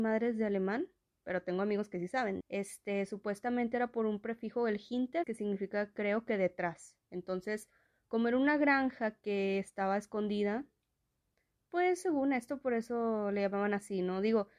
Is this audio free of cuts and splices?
no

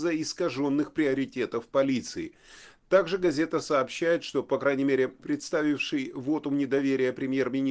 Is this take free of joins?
no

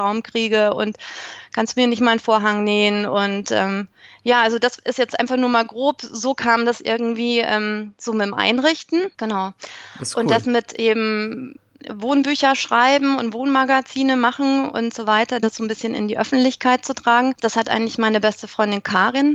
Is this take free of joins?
yes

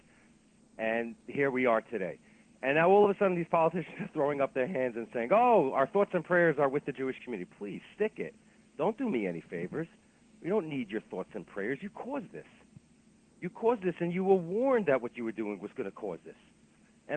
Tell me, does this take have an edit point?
no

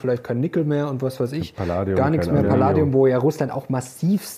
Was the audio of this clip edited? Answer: no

